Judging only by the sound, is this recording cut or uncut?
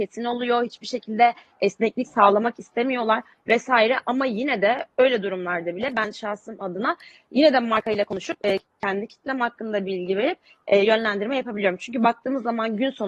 uncut